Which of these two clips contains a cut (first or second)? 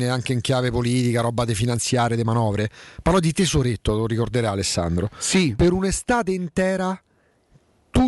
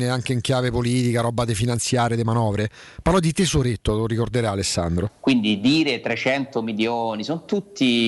second